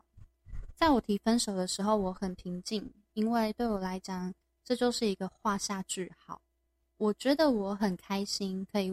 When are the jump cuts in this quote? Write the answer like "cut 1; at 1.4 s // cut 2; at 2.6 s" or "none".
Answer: none